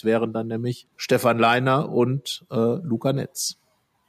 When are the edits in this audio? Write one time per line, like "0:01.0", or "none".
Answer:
0:00.9

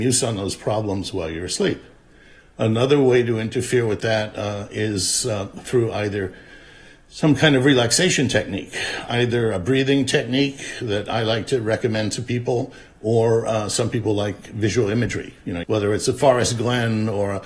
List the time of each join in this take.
0:15.6

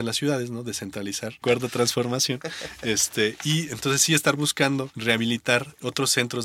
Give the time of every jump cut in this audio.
0:01.4

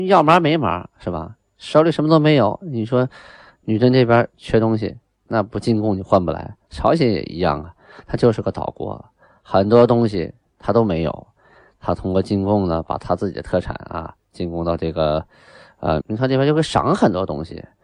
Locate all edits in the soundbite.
0:16.0

